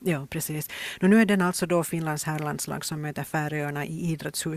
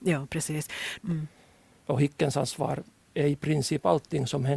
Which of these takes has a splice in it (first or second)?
second